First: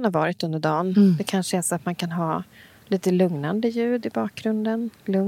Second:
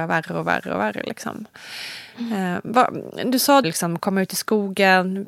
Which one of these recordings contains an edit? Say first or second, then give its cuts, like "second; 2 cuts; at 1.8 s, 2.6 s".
second; 1 cut; at 3.6 s